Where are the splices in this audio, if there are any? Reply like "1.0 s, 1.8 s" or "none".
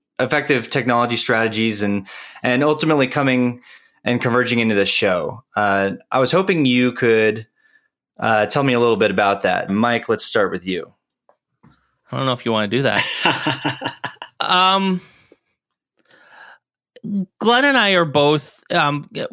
9.7 s